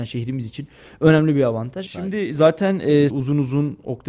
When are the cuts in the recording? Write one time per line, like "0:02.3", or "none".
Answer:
0:01.9
0:03.1